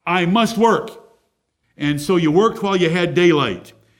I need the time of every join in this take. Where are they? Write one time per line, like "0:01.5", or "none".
0:01.6